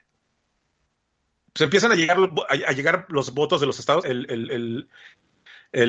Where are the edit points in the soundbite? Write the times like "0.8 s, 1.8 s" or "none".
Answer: 4.0 s